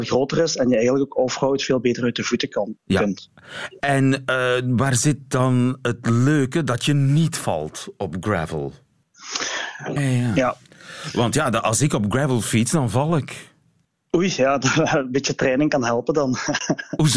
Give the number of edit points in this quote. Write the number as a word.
one